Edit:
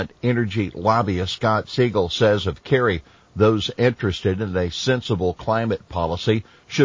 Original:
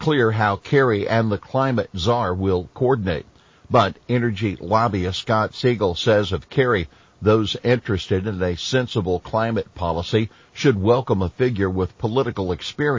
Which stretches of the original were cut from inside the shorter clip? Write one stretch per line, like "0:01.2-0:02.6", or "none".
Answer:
none